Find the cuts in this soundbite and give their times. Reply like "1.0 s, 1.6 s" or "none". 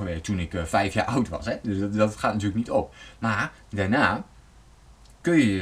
none